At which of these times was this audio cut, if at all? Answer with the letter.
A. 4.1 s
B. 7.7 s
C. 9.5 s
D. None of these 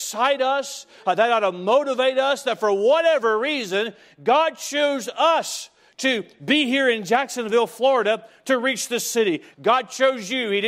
C